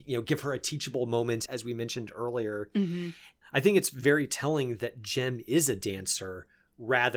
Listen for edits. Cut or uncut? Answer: cut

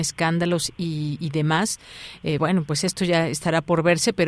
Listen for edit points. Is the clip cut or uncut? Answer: uncut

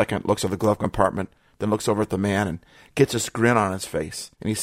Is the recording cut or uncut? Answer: uncut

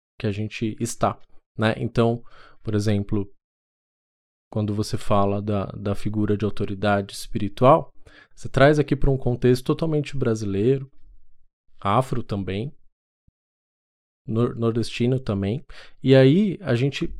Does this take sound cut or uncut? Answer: uncut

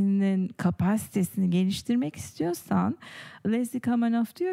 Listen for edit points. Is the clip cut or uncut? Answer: cut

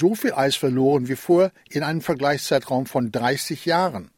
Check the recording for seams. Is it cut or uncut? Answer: uncut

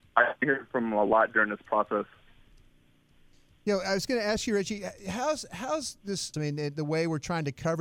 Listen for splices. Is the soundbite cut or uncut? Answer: cut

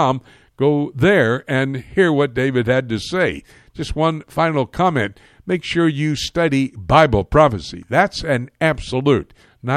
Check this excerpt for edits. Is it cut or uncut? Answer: uncut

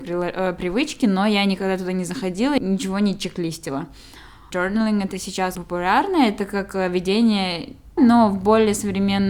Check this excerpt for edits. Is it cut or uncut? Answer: cut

